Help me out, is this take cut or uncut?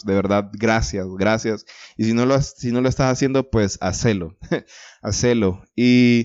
uncut